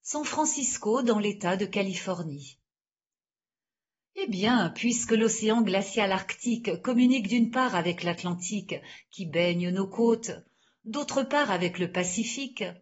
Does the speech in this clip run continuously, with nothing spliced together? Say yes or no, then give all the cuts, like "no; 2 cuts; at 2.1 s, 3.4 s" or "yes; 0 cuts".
yes; 0 cuts